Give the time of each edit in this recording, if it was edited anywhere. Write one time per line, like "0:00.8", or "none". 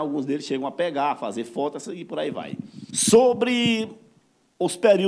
0:02.9